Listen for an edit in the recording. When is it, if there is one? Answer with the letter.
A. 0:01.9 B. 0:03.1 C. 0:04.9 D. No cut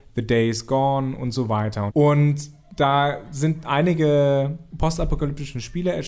A